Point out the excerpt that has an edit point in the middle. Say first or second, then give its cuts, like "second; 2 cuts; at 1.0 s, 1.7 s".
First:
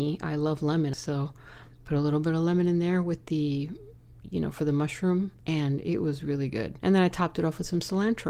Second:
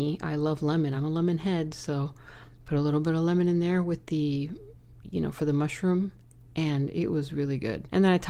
first; 2 cuts; at 0.9 s, 5.4 s